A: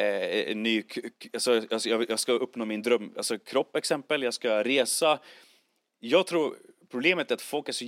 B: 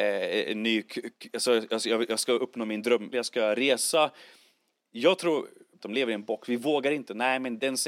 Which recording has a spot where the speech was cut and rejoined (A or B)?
B